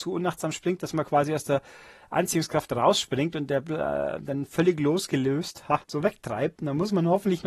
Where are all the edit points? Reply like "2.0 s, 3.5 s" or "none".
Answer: 5.8 s